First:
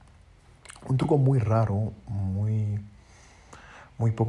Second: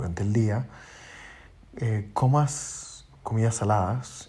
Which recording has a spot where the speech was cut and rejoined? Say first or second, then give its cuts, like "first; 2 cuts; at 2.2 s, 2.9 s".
second; 1 cut; at 3.1 s